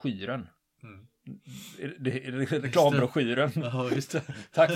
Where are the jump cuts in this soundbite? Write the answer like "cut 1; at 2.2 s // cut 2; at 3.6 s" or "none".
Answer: none